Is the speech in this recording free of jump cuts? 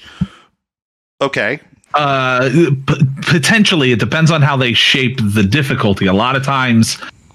no; 1 cut; at 1.9 s

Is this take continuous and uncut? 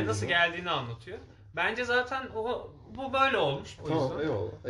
no; 1 cut; at 3.8 s

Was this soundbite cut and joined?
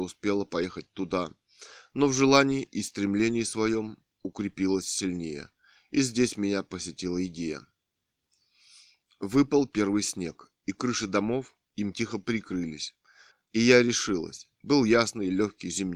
yes; 1 cut; at 13.3 s

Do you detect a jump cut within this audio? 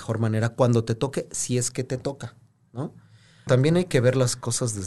yes; 1 cut; at 3.5 s

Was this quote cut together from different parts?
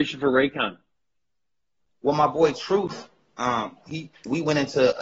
no; 0 cuts

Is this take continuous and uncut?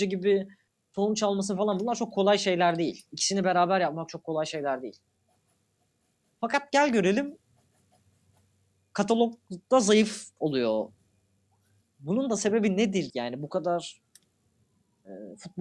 no; 2 cuts; at 11.8 s, 13.1 s

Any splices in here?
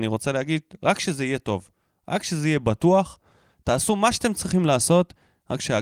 no; 0 cuts

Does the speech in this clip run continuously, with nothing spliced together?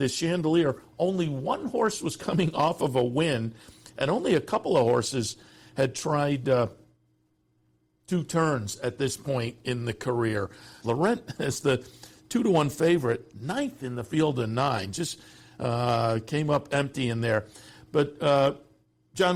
no; 1 cut; at 10.8 s

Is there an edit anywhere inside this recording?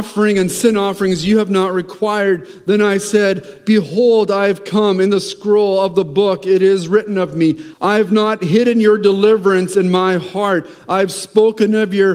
yes; 1 cut; at 7.7 s

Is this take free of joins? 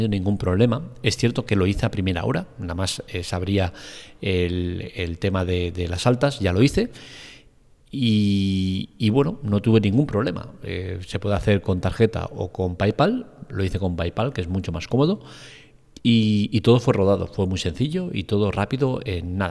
yes; 0 cuts

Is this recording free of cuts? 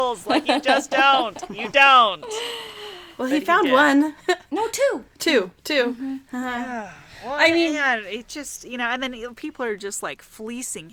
yes; 0 cuts

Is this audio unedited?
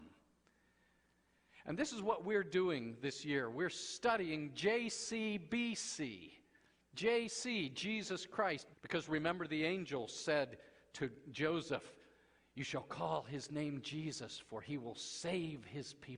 no; 1 cut; at 8.7 s

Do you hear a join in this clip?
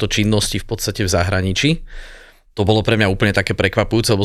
no; 0 cuts

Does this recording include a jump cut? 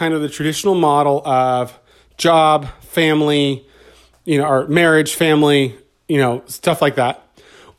no; 0 cuts

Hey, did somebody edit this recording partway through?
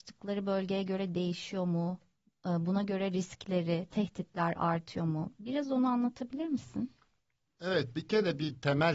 no; 0 cuts

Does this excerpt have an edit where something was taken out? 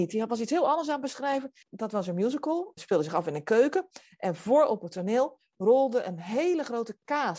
yes; 2 cuts; at 1.6 s, 2.8 s

